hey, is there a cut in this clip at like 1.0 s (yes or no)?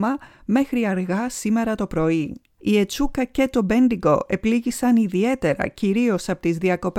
no